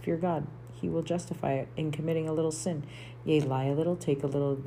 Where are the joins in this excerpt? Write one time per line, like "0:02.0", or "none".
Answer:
none